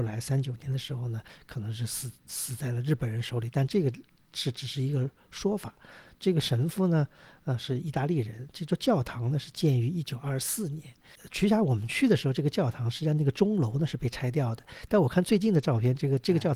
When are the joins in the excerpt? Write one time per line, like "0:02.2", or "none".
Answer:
none

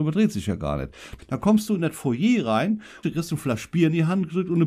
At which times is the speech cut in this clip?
0:01.2
0:03.0

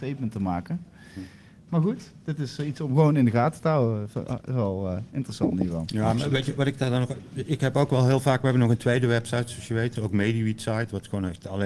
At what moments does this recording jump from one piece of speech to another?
0:10.0

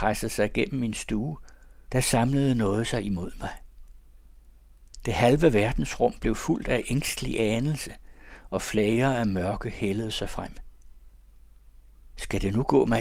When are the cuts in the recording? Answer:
0:01.9

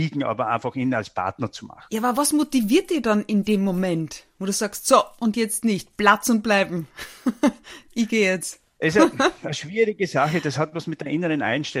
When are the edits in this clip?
none

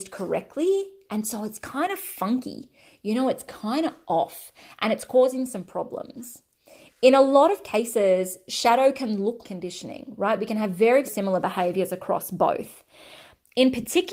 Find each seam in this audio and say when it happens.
0:09.4
0:11.0

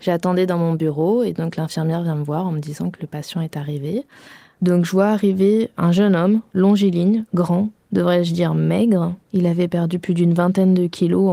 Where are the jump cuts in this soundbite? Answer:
0:07.8

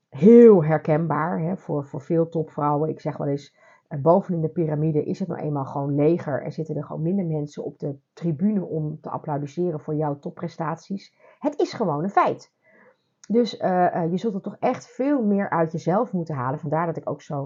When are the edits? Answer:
none

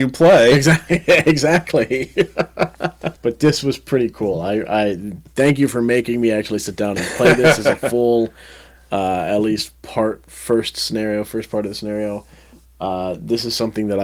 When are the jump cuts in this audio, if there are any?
0:03.2

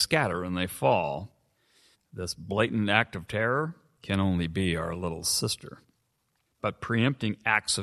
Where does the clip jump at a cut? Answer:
0:01.9
0:06.5

